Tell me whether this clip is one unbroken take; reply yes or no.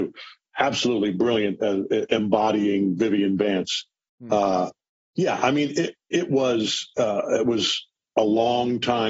yes